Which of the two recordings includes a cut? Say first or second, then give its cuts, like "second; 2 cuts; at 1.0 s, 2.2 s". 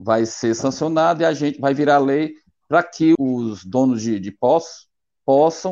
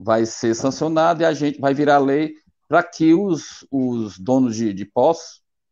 first; 1 cut; at 3.2 s